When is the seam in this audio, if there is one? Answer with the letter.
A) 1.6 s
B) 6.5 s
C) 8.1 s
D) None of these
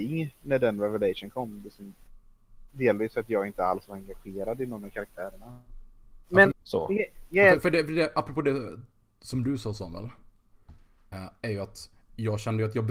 B